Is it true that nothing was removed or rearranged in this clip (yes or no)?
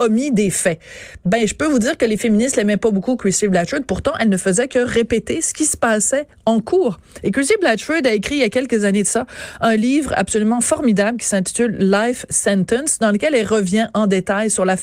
yes